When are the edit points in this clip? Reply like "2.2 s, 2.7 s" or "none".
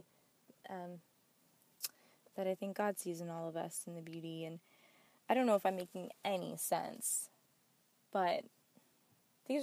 none